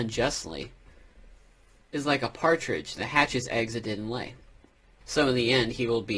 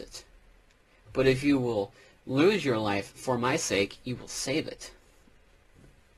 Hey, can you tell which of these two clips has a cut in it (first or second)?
first